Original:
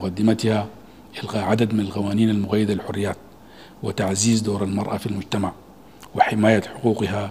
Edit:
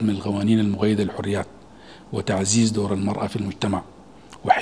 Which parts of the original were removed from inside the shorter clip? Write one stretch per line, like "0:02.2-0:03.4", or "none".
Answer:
none